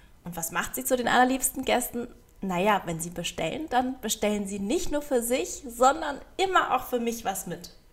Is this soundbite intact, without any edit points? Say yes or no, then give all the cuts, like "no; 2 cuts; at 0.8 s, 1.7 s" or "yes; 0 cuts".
yes; 0 cuts